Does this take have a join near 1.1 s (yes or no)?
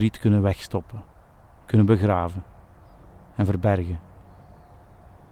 no